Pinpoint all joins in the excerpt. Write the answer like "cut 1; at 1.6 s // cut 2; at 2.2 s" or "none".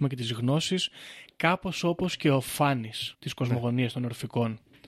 cut 1; at 3.1 s